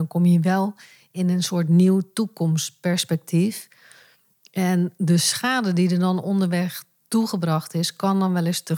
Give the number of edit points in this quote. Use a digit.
0